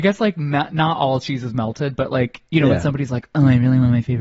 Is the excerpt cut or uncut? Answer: uncut